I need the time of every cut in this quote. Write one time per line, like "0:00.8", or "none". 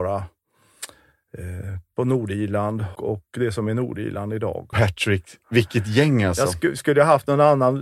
0:03.0
0:04.7